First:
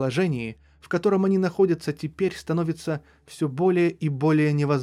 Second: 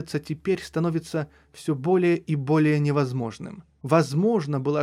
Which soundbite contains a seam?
second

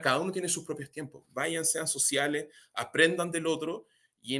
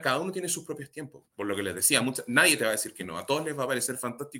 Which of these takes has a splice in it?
second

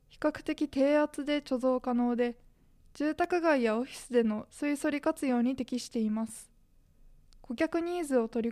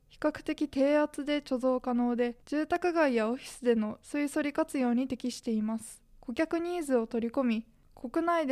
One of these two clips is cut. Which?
second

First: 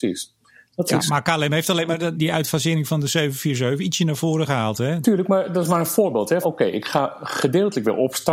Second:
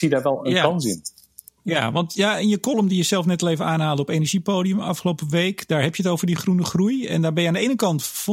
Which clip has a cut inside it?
first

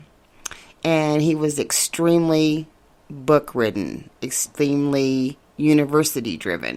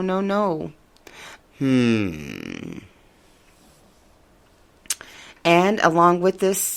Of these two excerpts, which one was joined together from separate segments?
second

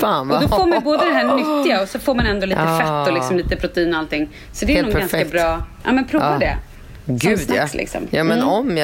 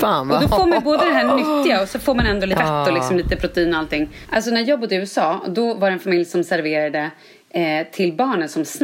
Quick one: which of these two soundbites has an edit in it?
second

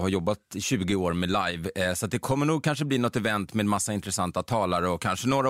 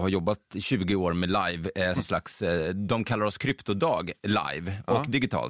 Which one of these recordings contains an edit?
second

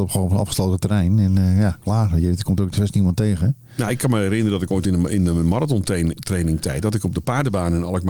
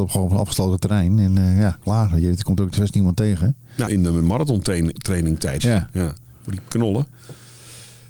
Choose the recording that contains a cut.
second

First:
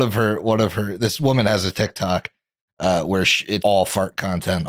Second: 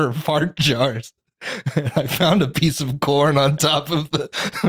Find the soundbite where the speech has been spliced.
first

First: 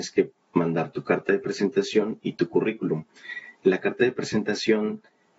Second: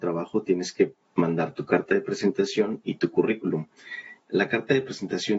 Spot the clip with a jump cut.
second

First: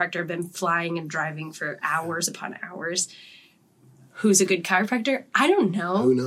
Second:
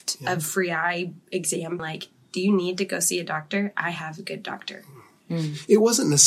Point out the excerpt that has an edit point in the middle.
second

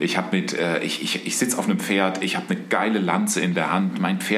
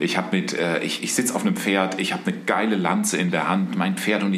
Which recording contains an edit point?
second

